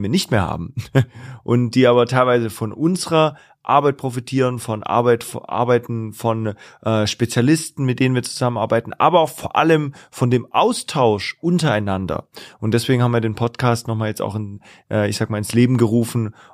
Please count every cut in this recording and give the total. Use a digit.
0